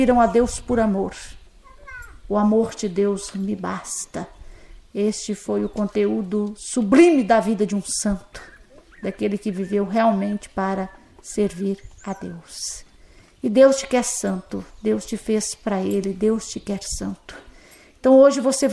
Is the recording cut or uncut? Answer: uncut